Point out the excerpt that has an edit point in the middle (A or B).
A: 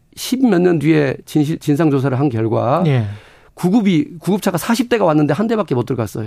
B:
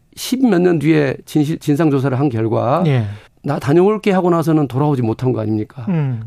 B